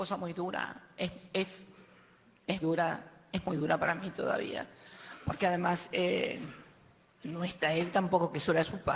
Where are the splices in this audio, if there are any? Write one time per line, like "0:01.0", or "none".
0:02.6